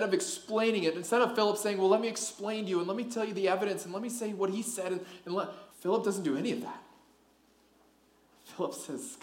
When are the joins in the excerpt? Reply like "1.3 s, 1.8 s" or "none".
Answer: 5.7 s